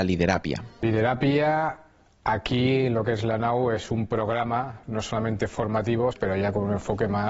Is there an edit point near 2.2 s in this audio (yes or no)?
no